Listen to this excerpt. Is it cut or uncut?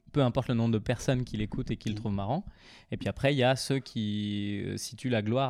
uncut